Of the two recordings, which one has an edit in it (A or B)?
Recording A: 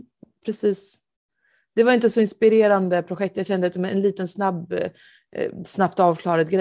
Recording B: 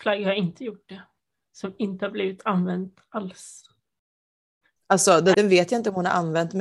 B